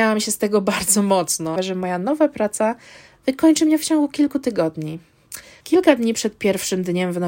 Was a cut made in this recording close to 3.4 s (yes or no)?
no